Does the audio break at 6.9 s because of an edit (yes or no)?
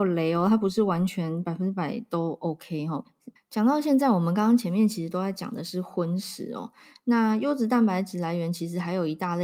no